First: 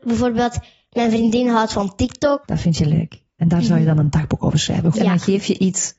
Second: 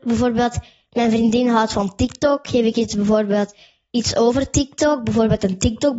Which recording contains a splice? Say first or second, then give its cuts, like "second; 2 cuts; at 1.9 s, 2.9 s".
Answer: first; 2 cuts; at 2.4 s, 4.9 s